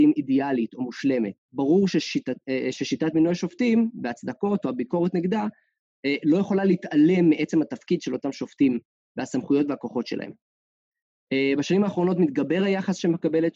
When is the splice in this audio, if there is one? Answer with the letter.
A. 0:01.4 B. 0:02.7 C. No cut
A